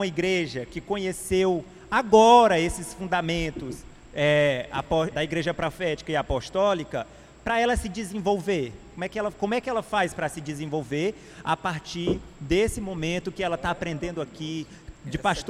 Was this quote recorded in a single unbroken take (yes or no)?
no